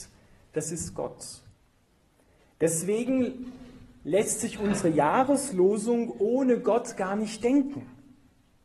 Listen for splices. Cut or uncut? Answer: uncut